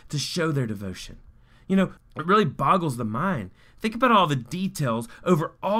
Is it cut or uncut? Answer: cut